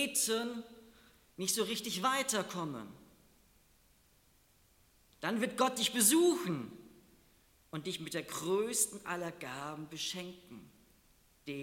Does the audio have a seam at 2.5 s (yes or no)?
no